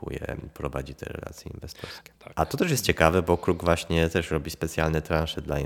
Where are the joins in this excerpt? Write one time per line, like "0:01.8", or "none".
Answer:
0:02.2